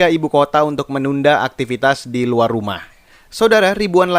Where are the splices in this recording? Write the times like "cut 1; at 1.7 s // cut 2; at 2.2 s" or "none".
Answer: cut 1; at 3.3 s